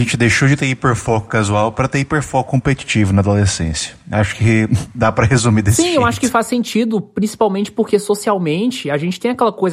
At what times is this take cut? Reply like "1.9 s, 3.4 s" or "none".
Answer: none